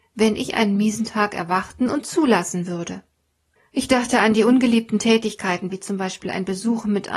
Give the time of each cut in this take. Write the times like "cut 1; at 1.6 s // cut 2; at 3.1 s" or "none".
cut 1; at 3.6 s // cut 2; at 5.7 s